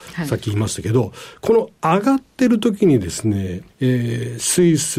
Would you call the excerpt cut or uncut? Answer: cut